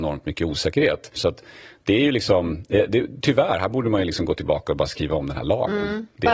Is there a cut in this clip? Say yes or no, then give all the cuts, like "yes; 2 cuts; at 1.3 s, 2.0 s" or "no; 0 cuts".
yes; 1 cut; at 1.2 s